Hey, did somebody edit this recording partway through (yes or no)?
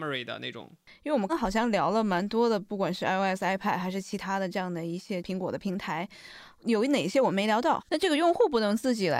yes